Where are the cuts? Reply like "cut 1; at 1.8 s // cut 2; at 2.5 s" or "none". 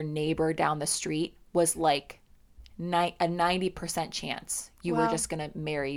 none